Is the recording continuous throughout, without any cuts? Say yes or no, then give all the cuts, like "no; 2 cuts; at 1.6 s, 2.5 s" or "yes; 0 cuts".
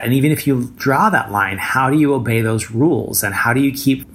yes; 0 cuts